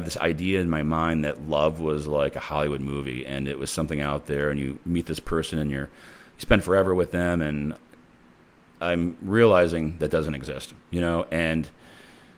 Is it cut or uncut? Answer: uncut